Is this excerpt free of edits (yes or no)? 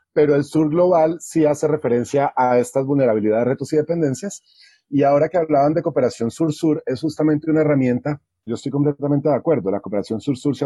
no